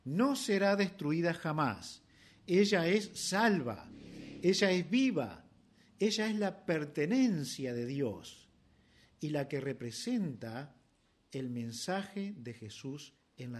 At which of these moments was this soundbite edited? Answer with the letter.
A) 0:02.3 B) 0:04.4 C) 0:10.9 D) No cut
D